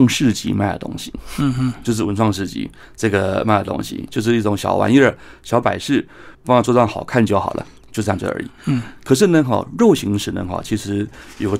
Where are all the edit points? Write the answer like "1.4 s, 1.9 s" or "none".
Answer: 6.3 s